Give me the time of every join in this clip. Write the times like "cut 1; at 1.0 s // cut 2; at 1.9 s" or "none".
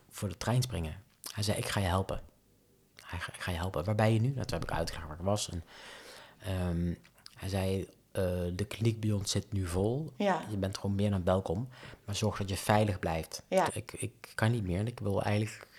cut 1; at 10.1 s // cut 2; at 13.7 s